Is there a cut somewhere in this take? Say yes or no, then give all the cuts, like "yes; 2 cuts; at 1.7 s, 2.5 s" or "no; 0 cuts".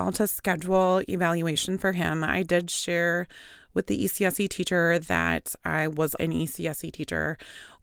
yes; 1 cut; at 6.2 s